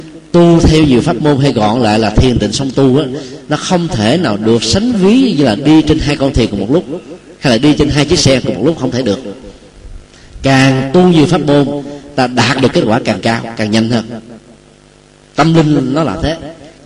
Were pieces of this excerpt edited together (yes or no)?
no